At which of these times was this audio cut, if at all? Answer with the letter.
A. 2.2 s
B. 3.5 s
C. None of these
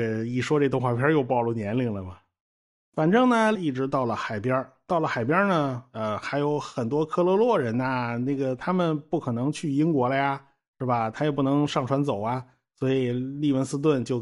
B